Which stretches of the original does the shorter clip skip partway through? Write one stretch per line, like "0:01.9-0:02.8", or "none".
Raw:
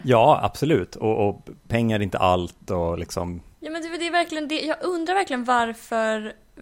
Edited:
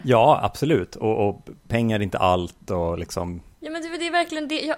none